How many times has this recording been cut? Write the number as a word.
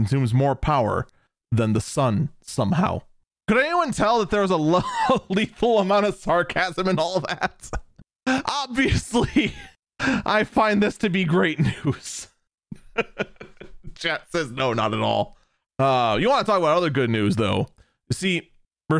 one